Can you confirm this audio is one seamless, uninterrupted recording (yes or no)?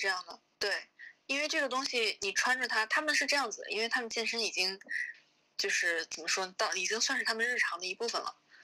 yes